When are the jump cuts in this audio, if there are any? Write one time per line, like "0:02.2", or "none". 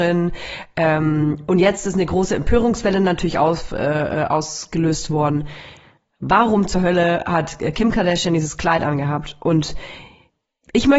none